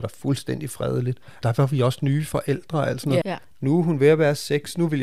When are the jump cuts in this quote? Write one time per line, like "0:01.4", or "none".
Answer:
0:01.4
0:03.2